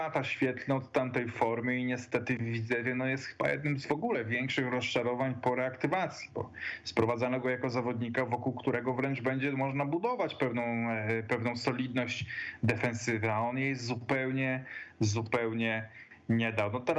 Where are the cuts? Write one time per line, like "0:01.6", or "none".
none

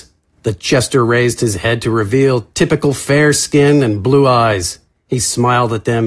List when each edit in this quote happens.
none

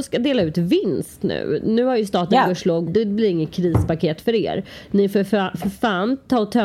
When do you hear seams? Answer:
0:02.9

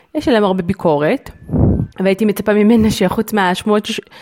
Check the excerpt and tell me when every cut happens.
0:01.9

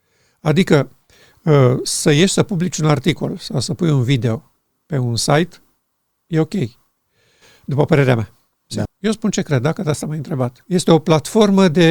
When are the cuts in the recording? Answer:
0:08.9
0:10.6

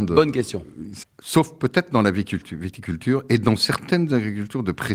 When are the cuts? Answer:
0:01.0

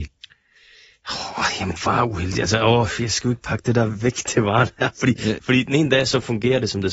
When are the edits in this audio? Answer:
0:05.4

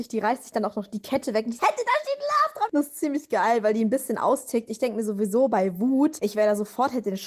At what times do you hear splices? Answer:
0:01.6

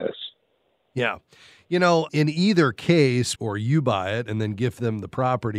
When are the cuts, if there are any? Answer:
0:02.1
0:03.4

